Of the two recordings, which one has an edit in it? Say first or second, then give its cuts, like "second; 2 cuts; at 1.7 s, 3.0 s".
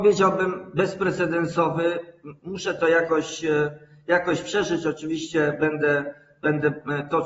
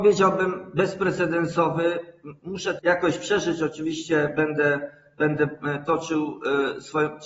second; 1 cut; at 2.8 s